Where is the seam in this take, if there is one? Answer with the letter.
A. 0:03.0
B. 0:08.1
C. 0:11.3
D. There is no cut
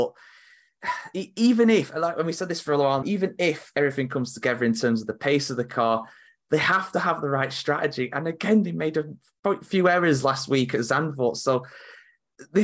A